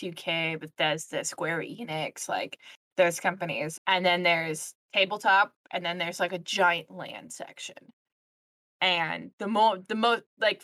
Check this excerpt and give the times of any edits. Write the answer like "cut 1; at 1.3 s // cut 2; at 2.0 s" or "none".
cut 1; at 3.8 s